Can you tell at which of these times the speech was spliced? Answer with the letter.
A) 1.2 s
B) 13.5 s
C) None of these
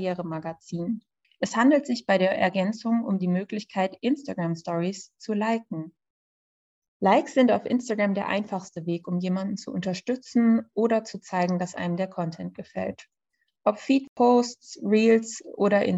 A